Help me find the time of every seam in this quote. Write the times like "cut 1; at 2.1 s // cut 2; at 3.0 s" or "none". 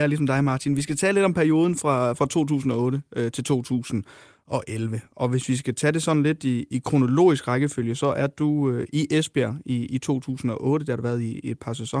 none